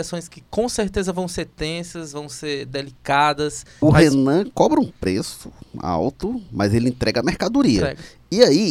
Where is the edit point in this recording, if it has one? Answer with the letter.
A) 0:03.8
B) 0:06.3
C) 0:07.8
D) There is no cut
A